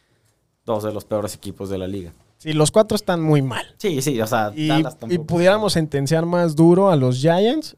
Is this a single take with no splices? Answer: yes; 0 cuts

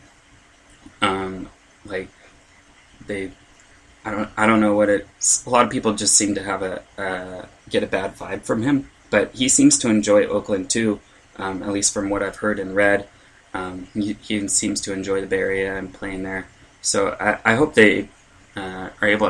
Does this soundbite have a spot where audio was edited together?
no; 0 cuts

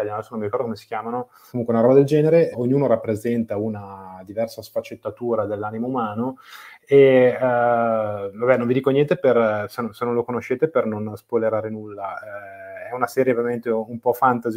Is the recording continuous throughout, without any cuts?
no; 2 cuts; at 1.5 s, 2.5 s

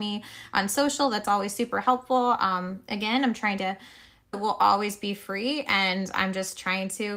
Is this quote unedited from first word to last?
no; 1 cut; at 4.3 s

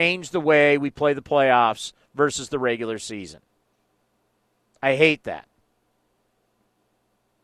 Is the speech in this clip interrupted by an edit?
no; 0 cuts

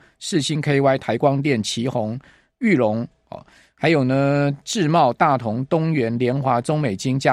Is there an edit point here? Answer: no; 0 cuts

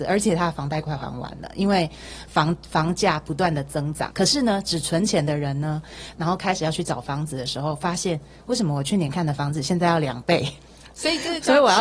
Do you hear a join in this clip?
yes; 2 cuts; at 4.1 s, 6.2 s

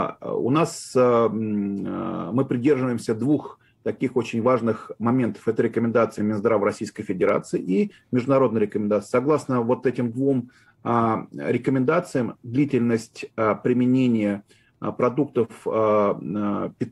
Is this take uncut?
no; 1 cut; at 6.2 s

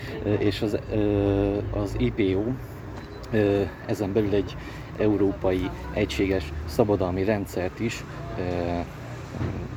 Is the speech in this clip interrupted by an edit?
no; 0 cuts

